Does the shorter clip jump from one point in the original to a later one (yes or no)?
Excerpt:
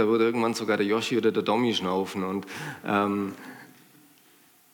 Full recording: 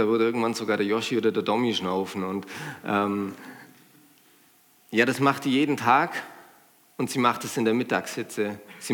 no